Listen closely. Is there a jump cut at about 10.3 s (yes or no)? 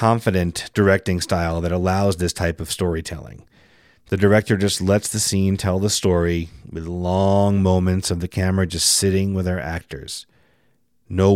no